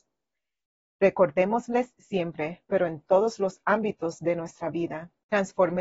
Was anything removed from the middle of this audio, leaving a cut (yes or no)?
yes